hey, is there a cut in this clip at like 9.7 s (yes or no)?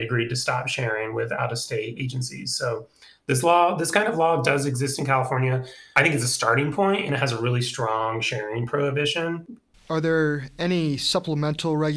yes